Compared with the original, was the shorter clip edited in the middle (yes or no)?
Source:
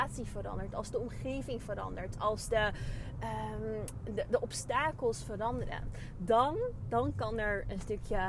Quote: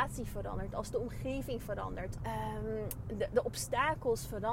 yes